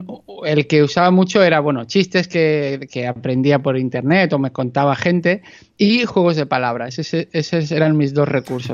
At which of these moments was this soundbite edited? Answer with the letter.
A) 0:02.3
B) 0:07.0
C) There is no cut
C